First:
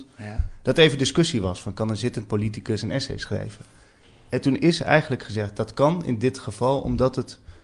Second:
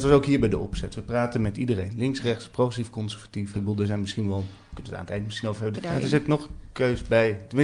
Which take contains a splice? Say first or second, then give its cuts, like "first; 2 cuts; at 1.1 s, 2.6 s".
second; 2 cuts; at 3.5 s, 5.7 s